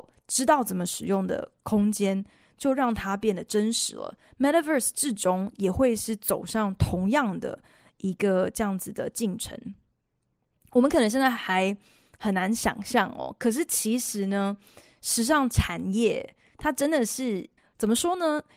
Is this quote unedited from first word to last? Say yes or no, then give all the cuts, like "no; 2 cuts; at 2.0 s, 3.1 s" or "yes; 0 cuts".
no; 1 cut; at 17.6 s